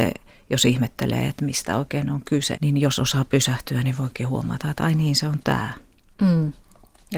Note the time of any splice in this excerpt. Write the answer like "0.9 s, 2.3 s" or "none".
2.6 s